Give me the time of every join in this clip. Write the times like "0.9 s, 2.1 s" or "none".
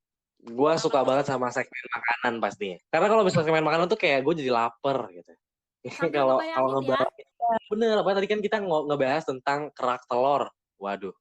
2.8 s, 7.3 s